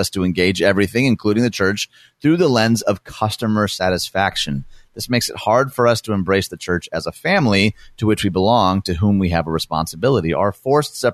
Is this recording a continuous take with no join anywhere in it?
yes; 0 cuts

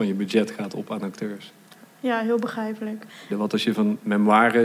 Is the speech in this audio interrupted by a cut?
yes; 1 cut; at 3.3 s

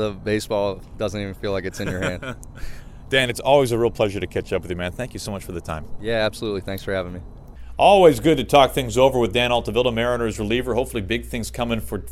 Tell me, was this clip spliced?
no; 0 cuts

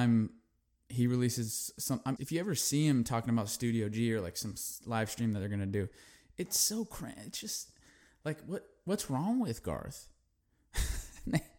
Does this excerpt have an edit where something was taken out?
yes; 1 cut; at 2.2 s

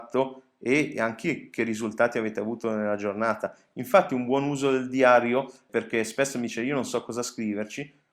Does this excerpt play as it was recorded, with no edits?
yes; 0 cuts

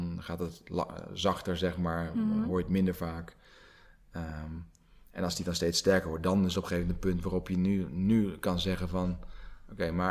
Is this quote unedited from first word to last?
yes; 0 cuts

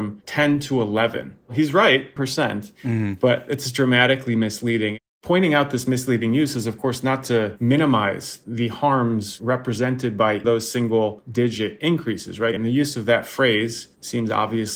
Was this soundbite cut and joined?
yes; 3 cuts; at 2.2 s, 10.4 s, 12.6 s

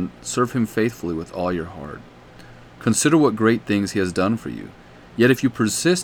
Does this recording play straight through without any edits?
yes; 0 cuts

